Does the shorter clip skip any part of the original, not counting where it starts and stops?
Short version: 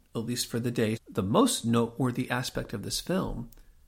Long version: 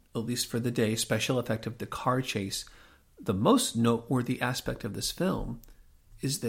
yes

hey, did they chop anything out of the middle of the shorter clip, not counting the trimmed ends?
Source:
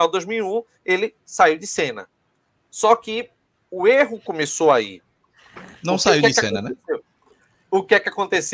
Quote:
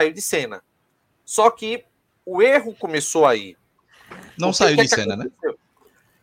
no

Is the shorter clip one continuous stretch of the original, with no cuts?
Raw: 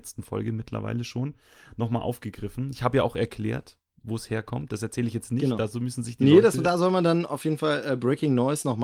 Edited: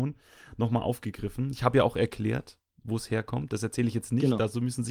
yes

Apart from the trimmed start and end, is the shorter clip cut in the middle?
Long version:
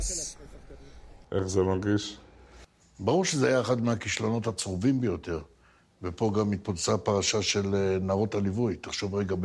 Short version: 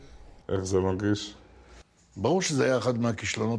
no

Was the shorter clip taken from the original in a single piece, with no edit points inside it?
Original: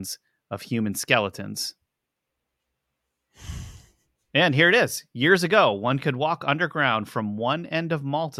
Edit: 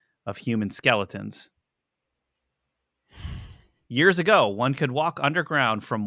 no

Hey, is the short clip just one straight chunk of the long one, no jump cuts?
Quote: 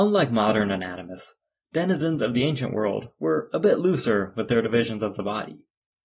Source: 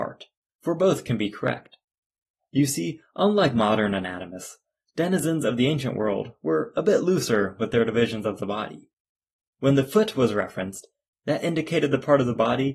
yes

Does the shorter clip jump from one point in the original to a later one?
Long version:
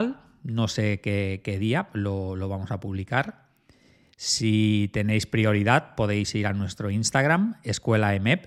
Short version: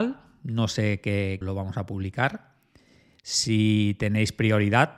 yes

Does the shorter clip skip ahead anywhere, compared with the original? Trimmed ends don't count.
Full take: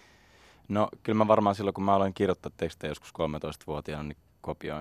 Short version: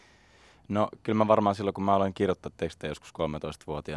no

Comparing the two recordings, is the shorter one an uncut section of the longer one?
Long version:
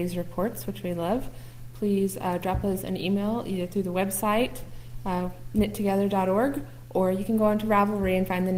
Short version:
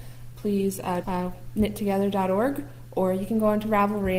no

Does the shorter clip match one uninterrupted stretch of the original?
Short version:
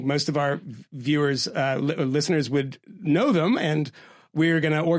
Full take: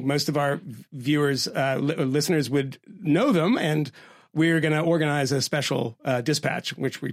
yes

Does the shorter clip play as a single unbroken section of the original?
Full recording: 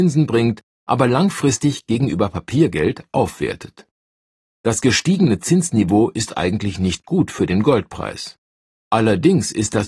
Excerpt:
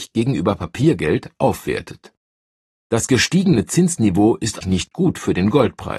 no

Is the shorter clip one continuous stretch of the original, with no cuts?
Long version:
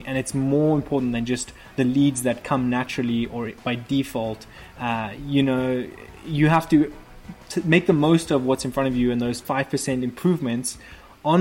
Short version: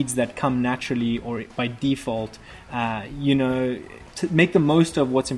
no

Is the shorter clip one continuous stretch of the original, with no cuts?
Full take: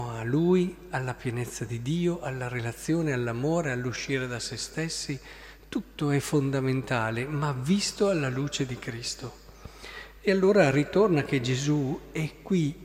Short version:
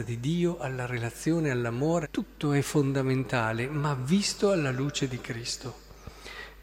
no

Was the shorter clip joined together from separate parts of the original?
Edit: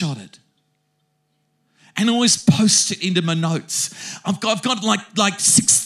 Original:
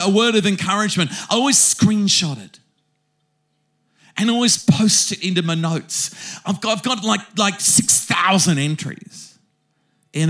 no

